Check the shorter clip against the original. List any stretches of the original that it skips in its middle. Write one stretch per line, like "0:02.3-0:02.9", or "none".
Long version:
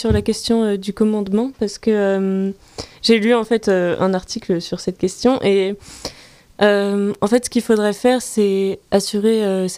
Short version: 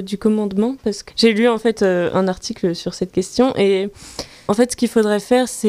0:01.8-0:02.9
0:06.3-0:07.2